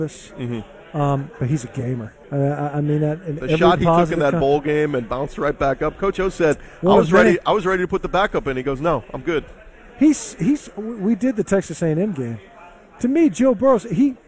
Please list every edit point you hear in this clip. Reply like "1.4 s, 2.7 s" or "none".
2.2 s